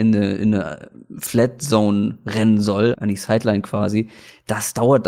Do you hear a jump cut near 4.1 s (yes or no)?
no